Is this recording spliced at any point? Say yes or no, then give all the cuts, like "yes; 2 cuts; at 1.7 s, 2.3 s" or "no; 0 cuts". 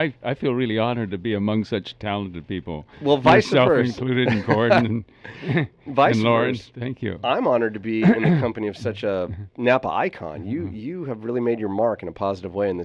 no; 0 cuts